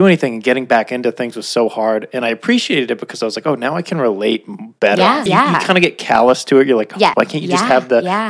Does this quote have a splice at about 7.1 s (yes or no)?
yes